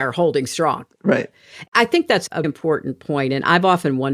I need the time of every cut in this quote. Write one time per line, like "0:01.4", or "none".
0:02.4